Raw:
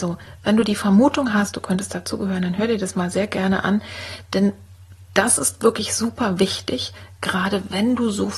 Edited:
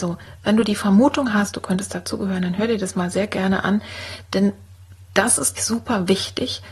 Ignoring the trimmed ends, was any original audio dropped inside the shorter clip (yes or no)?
yes